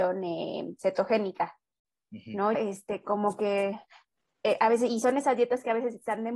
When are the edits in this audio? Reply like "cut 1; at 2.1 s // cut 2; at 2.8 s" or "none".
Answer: cut 1; at 2.5 s